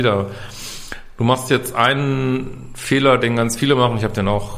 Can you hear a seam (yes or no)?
no